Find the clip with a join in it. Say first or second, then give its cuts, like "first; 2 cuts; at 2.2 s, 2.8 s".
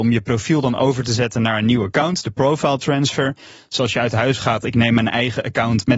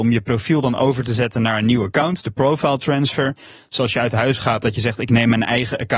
first; 1 cut; at 4.6 s